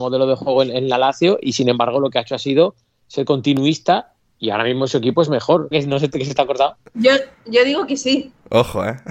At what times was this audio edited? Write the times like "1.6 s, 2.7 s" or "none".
5.7 s